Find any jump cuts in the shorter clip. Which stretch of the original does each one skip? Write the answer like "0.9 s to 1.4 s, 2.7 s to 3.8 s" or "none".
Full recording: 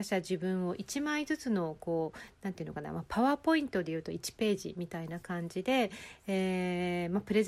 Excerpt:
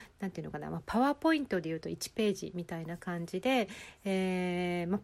none

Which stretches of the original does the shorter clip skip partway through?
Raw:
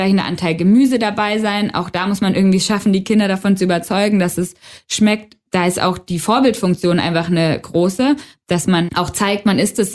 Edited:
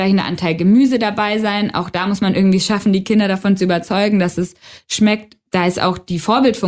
none

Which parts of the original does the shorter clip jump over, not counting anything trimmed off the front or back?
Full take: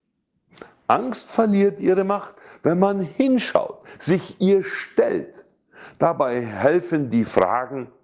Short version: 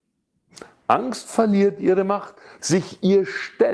2.6 s to 4.0 s

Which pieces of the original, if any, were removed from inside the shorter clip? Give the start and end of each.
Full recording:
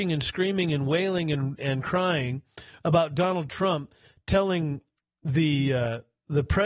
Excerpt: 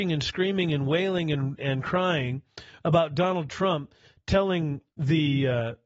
4.9 s to 5.2 s

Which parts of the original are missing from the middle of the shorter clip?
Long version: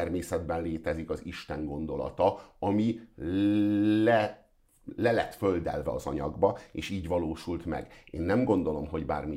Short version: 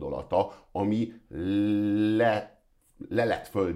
none

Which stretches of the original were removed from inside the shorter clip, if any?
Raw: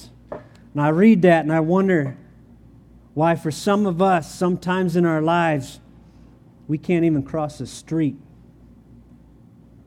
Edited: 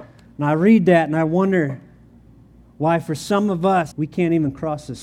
4.3 s to 6.6 s

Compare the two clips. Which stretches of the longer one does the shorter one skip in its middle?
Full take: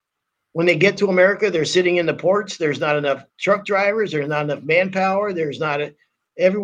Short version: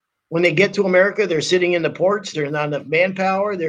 2.6 s to 4.1 s

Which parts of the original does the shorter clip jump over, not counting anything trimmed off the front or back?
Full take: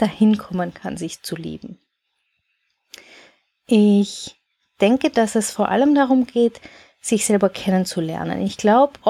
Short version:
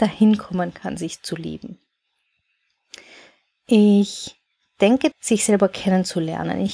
5.1 s to 6.9 s

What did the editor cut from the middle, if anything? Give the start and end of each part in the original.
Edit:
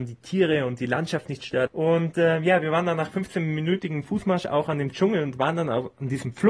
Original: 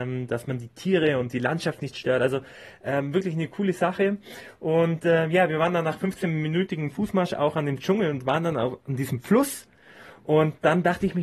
2.2 s to 4.5 s

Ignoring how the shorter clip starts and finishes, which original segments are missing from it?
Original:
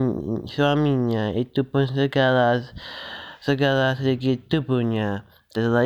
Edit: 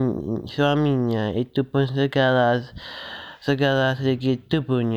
none

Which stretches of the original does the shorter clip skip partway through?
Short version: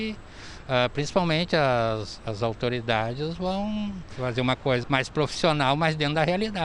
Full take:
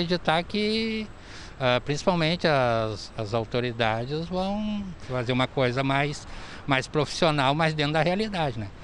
5.7 s to 6.6 s

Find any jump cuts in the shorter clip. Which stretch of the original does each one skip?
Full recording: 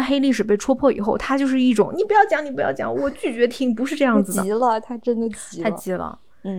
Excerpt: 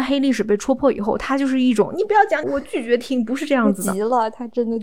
2.4 s to 2.9 s

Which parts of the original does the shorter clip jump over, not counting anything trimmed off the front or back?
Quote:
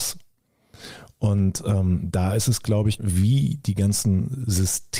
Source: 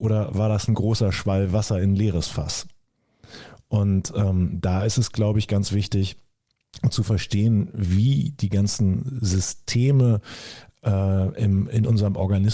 5.5 s to 7.7 s

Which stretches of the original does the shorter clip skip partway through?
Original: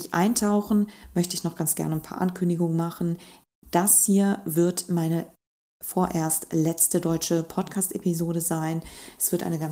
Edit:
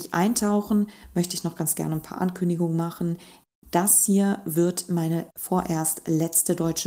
5.3 s to 5.8 s

